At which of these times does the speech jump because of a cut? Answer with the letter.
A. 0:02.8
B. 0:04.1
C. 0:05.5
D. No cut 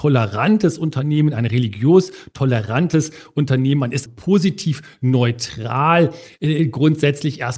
B